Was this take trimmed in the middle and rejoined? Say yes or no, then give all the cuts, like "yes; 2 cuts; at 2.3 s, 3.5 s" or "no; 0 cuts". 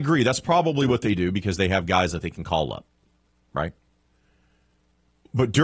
no; 0 cuts